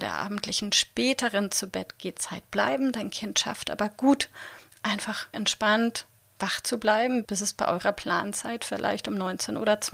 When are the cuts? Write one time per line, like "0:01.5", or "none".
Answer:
0:05.3
0:07.2